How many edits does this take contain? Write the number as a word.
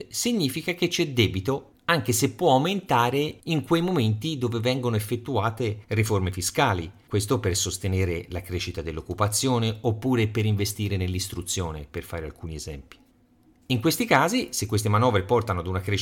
zero